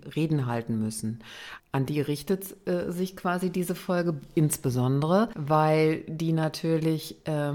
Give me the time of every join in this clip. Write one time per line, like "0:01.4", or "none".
0:01.6